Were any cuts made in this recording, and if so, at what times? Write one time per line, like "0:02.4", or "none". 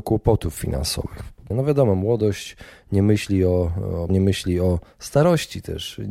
0:01.5
0:04.1